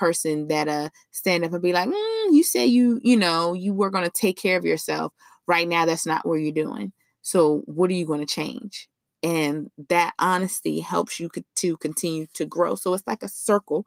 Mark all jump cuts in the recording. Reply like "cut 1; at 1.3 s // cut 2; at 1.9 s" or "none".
none